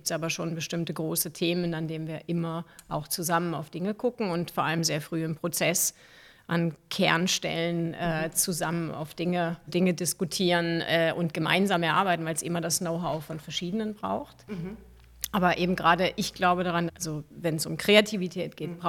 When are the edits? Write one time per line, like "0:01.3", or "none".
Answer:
0:09.7
0:16.9